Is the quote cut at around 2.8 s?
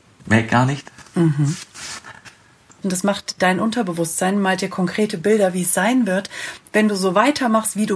yes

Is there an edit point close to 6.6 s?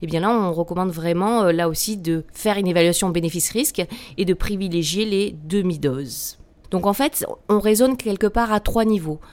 yes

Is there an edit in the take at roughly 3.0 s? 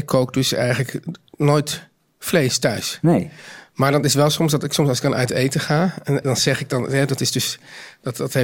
no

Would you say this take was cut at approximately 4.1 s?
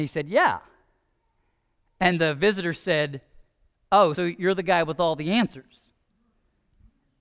yes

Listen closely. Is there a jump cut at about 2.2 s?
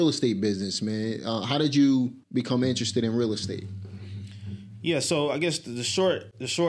yes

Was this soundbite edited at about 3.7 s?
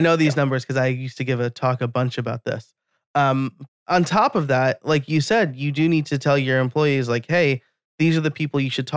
yes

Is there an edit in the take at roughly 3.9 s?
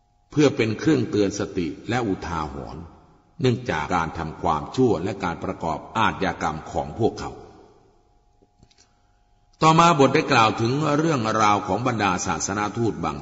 yes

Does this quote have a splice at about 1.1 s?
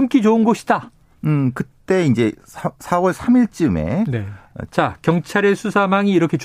yes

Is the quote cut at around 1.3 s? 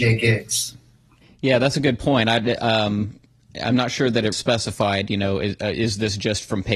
no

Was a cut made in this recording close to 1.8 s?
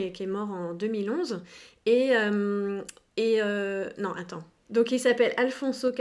no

